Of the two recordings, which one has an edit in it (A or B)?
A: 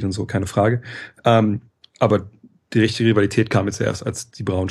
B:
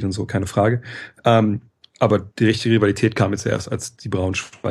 B